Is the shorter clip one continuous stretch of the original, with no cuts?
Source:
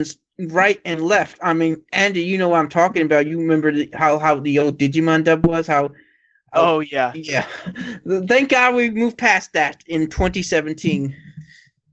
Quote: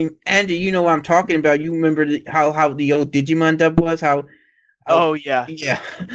yes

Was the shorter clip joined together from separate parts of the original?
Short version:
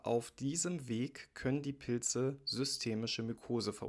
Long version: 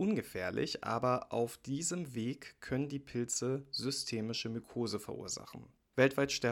no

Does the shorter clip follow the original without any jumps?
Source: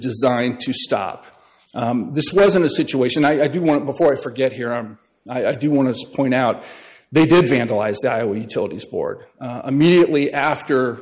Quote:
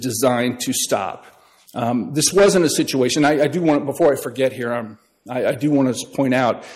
yes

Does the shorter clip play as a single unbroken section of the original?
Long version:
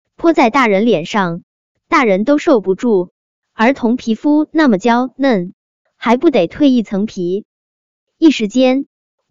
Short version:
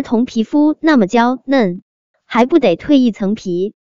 yes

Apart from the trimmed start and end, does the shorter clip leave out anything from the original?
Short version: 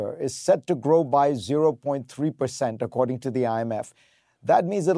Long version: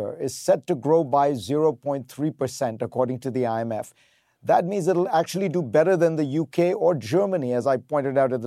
no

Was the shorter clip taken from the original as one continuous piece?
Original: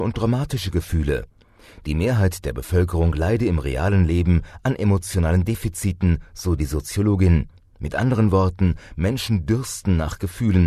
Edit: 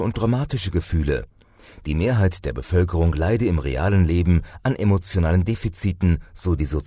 yes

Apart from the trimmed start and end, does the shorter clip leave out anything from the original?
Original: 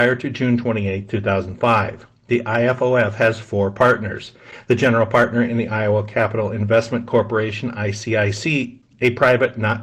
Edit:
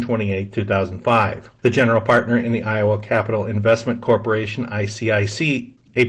yes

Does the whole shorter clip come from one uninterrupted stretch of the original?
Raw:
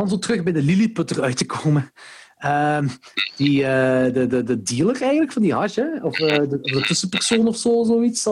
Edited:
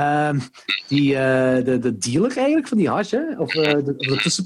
no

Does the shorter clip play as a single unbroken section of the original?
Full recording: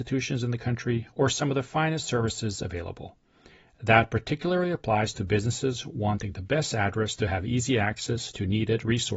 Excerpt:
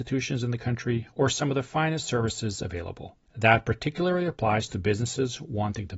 no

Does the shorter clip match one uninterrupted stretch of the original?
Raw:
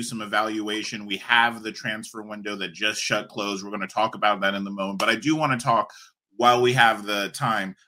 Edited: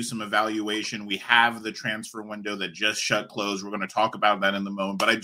yes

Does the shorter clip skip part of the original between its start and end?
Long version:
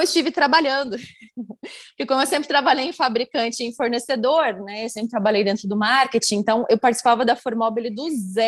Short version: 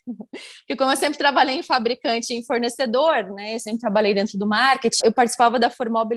yes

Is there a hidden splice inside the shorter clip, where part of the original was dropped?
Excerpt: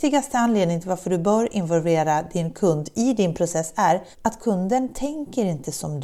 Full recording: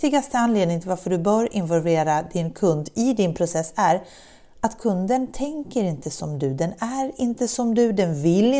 yes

